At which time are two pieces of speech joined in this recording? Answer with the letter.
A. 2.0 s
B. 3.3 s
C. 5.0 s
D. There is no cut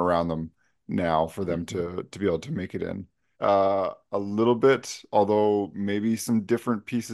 B